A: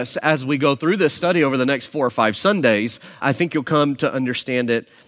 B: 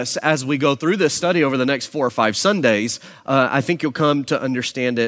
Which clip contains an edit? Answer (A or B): A